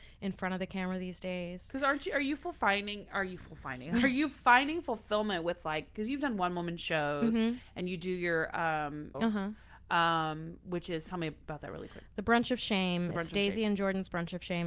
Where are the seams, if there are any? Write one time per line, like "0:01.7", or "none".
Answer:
0:09.1